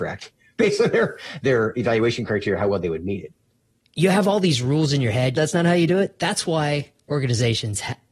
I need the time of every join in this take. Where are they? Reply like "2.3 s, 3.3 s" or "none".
3.8 s, 5.3 s